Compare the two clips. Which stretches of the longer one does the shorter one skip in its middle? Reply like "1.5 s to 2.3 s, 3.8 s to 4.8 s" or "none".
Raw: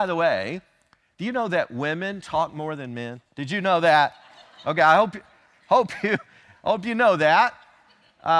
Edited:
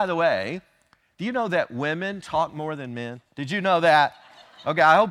none